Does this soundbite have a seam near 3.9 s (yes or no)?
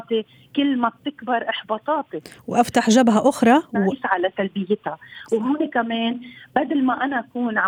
yes